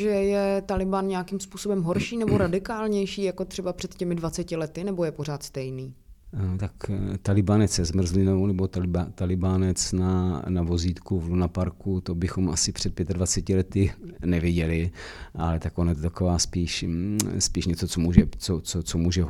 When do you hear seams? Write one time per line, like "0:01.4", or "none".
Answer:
none